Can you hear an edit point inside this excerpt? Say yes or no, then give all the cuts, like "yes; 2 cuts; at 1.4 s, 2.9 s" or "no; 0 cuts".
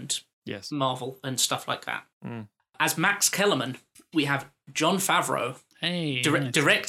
no; 0 cuts